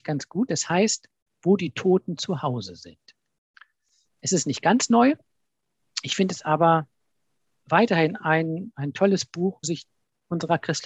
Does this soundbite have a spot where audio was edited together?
yes; 1 cut; at 9.6 s

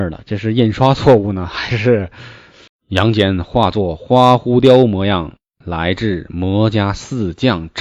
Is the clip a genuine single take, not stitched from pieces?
no; 1 cut; at 2.7 s

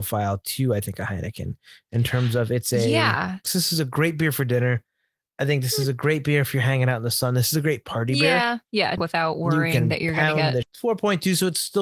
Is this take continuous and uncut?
no; 3 cuts; at 3.4 s, 9.0 s, 10.6 s

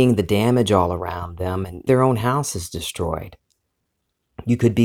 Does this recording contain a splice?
yes; 1 cut; at 1.9 s

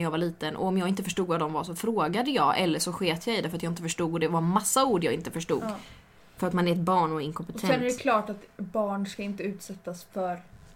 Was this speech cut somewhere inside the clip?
no; 0 cuts

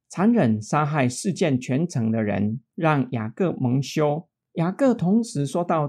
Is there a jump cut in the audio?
no; 0 cuts

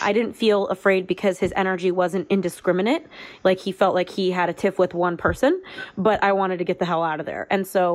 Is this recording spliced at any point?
no; 0 cuts

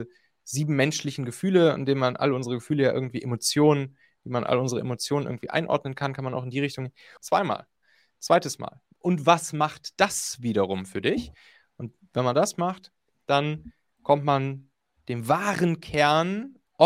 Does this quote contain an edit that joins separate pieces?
yes; 1 cut; at 7.2 s

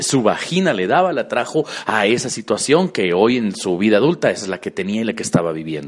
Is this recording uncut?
yes; 0 cuts

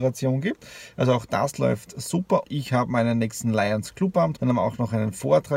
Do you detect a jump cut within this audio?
yes; 2 cuts; at 2.4 s, 4.4 s

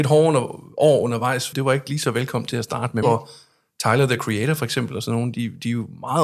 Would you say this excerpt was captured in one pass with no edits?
no; 2 cuts; at 1.5 s, 3.0 s

